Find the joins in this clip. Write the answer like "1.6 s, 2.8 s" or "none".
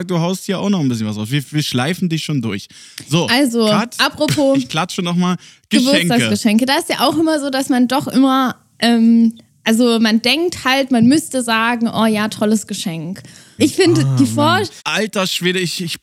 13.6 s, 14.8 s